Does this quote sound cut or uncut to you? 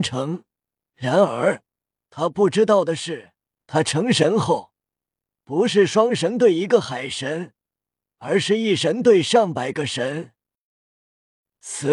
cut